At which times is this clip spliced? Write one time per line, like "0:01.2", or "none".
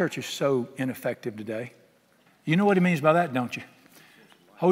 0:02.3